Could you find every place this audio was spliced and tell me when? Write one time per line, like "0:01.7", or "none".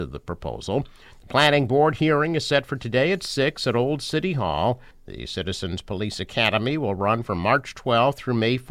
0:01.2
0:04.9